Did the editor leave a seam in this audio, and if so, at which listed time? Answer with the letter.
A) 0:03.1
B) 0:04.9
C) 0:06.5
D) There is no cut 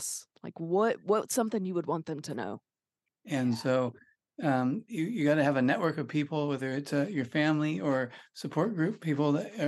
A